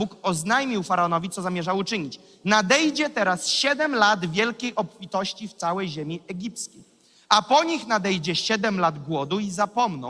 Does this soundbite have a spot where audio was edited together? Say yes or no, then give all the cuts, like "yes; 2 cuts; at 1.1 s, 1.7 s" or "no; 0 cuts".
no; 0 cuts